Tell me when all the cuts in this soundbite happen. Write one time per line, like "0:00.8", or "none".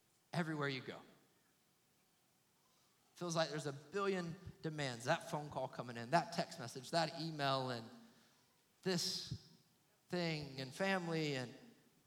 0:10.6